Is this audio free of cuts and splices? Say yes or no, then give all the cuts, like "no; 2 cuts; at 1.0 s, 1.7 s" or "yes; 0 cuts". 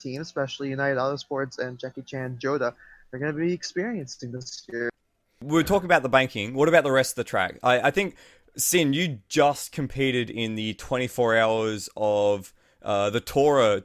yes; 0 cuts